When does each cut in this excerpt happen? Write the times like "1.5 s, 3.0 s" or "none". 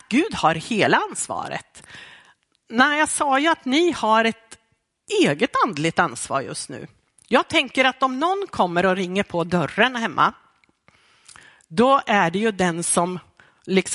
none